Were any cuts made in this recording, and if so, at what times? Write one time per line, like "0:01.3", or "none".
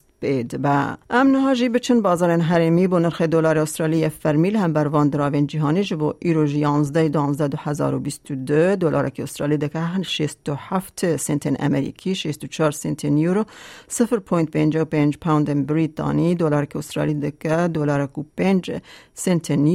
0:01.0